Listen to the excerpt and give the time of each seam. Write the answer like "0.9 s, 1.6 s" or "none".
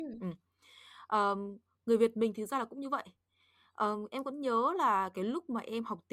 none